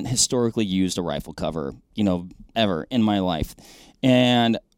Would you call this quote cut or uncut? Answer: cut